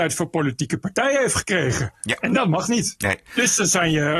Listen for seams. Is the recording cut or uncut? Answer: uncut